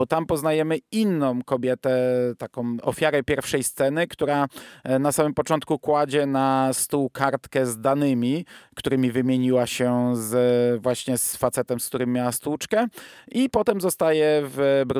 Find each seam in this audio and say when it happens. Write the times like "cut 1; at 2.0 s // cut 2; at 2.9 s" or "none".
none